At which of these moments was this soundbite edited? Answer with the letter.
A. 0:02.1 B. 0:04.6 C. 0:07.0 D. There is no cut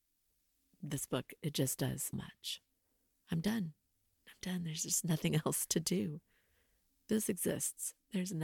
A